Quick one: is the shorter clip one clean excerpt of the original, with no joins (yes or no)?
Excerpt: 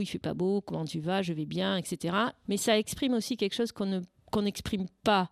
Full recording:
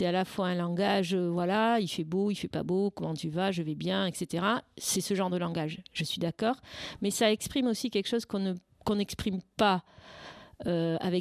no